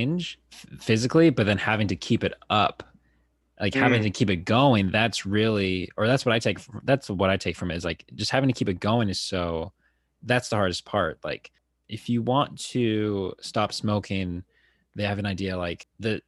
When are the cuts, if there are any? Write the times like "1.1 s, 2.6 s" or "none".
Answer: none